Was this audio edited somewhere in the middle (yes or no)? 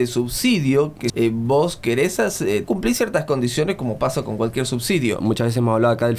yes